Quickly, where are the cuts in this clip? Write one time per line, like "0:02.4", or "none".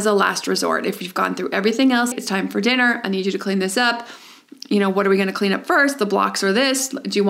0:02.1

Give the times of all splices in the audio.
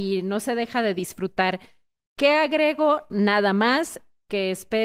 none

